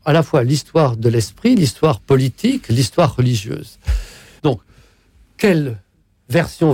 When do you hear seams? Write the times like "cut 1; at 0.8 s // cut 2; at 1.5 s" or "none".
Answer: cut 1; at 4.4 s

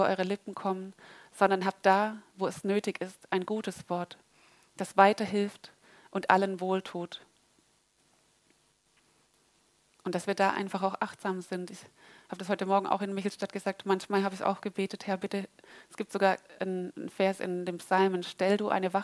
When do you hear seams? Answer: none

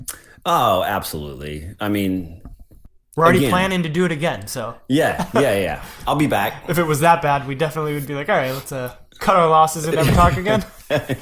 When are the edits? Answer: none

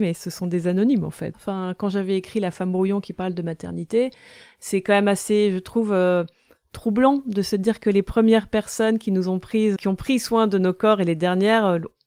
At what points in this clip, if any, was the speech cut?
cut 1; at 1.3 s // cut 2; at 9.8 s

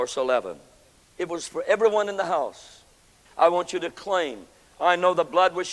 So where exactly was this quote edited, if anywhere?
cut 1; at 1.1 s // cut 2; at 3.2 s

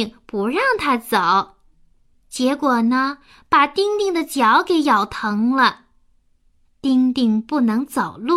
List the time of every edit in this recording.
none

